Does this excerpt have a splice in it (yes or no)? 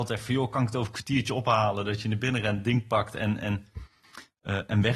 no